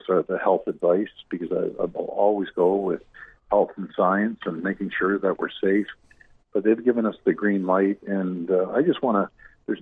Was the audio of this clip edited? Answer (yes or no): no